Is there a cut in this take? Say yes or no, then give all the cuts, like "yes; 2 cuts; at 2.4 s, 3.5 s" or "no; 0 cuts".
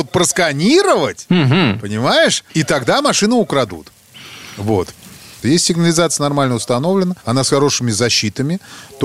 yes; 3 cuts; at 2.5 s, 5.4 s, 7.2 s